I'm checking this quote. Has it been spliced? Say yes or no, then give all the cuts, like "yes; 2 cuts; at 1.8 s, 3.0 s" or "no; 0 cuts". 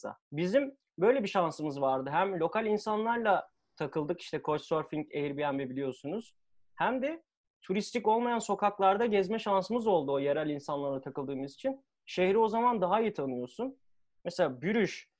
no; 0 cuts